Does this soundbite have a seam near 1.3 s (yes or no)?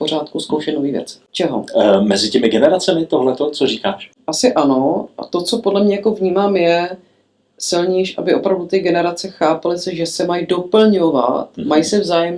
yes